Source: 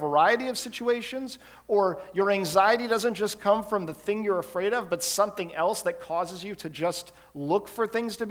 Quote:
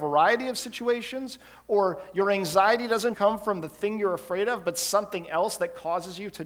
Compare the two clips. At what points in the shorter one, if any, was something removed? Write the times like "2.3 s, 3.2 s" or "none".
3.1 s